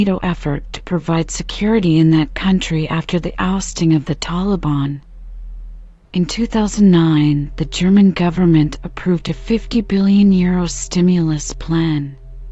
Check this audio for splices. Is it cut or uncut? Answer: cut